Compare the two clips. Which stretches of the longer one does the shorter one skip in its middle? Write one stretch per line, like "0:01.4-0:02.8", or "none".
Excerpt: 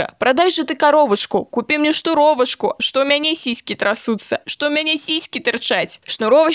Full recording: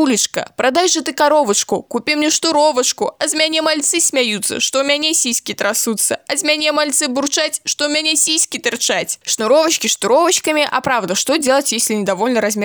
0:03.2-0:04.6
0:06.2-0:07.6